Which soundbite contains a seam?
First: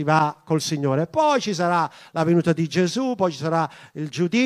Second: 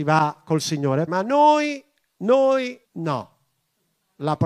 second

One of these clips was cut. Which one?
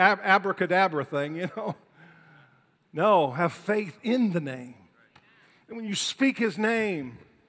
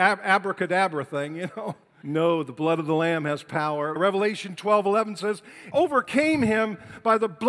second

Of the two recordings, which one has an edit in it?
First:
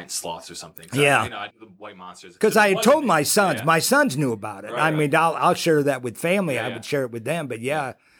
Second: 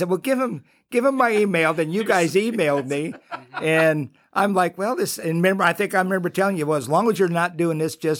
first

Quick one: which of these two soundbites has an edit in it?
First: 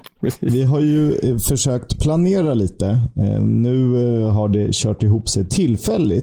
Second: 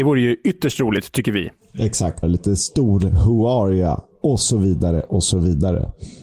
second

